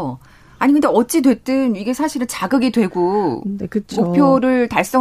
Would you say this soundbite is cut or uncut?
uncut